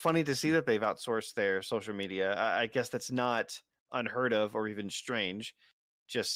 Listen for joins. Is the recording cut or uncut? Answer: uncut